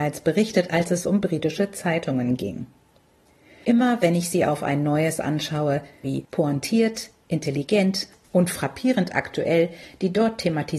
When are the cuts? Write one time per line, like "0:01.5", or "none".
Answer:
0:06.0